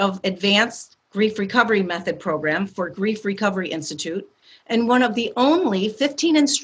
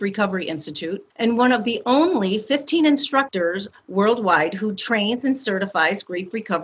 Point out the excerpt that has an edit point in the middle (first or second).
second